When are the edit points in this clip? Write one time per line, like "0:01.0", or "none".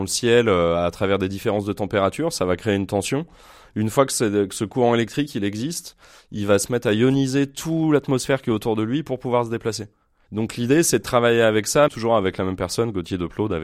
0:10.3
0:11.9